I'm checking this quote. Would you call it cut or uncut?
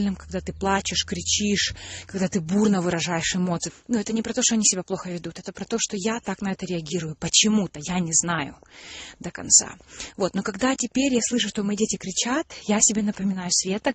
cut